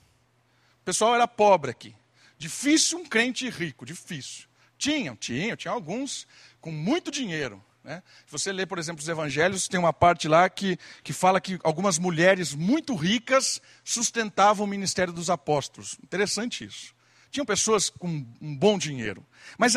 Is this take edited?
no; 0 cuts

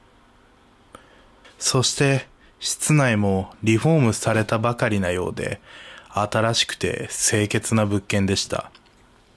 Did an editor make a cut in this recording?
yes; 1 cut; at 1.4 s

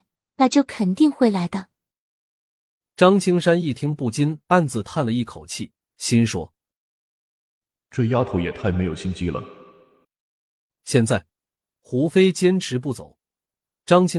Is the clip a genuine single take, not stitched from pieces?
yes; 0 cuts

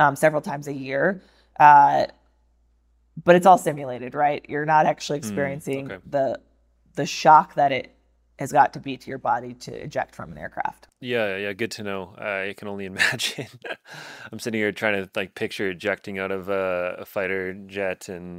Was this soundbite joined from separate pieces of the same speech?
no; 0 cuts

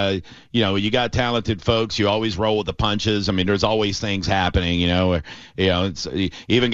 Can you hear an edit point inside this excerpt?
no; 0 cuts

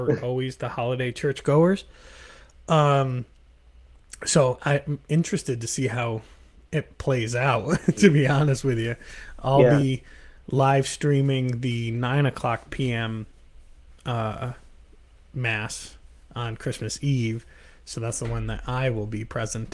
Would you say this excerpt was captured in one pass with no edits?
yes; 0 cuts

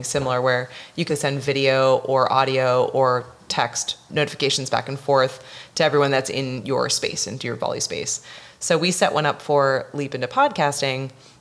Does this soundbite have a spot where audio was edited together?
yes; 1 cut; at 1.1 s

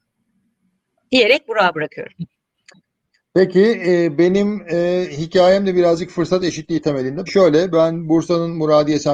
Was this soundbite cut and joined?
yes; 1 cut; at 7.3 s

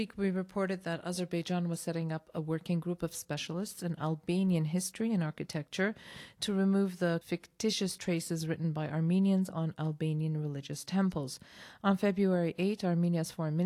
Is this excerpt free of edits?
no; 1 cut; at 7.2 s

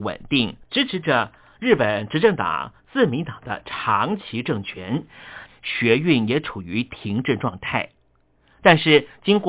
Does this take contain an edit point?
yes; 1 cut; at 5.5 s

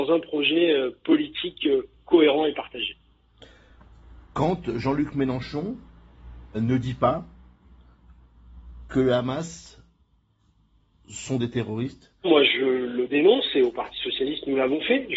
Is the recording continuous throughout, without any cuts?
no; 2 cuts; at 6.5 s, 12.2 s

